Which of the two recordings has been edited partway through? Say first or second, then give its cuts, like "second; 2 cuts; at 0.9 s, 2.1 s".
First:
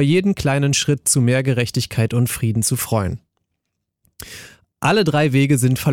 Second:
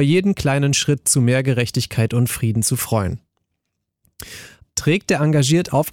second; 1 cut; at 4.6 s